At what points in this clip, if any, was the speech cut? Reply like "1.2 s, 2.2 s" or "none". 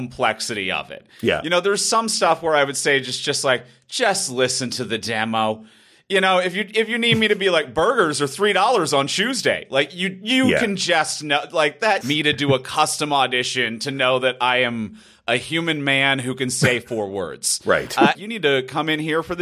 12.0 s, 18.1 s